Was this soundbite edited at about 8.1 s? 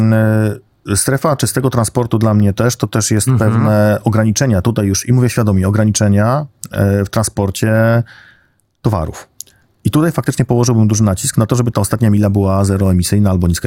no; 0 cuts

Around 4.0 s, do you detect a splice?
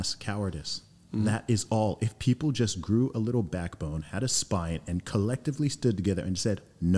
no; 0 cuts

